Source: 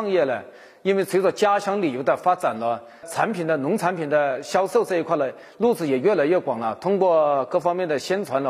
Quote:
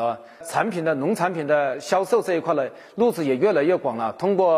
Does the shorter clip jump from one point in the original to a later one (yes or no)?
no